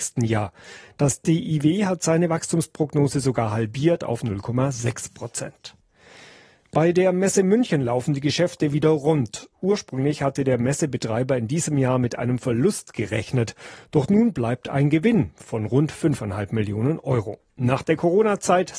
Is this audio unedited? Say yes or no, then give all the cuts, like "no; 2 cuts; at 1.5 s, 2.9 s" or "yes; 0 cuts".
yes; 0 cuts